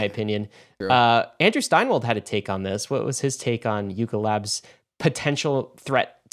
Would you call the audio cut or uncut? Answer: uncut